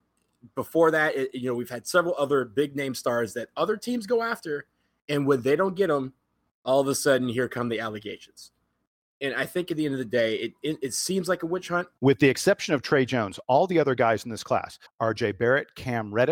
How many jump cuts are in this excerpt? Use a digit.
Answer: 2